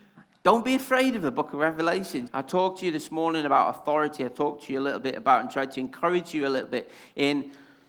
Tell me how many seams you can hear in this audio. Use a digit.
1